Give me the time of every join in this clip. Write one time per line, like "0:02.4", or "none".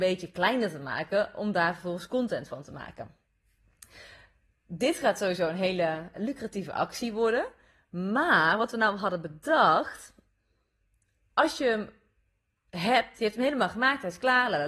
0:06.1